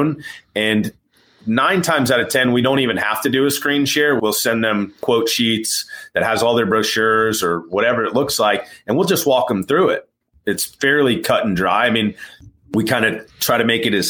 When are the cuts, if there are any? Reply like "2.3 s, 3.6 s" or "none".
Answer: none